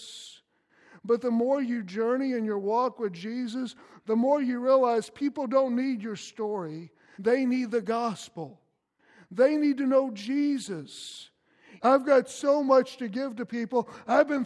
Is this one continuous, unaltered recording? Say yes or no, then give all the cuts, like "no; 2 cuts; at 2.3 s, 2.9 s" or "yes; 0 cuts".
no; 2 cuts; at 7.1 s, 11.8 s